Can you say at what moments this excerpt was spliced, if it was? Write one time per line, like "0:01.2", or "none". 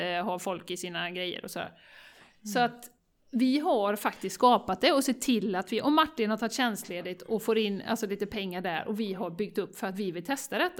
none